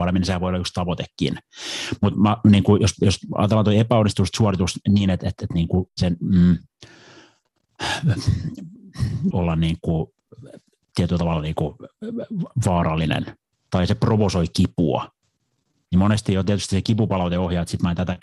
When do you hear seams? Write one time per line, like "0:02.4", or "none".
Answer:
0:05.9
0:09.3